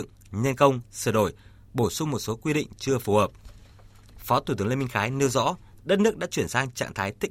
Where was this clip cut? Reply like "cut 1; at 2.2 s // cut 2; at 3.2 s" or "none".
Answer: cut 1; at 5.8 s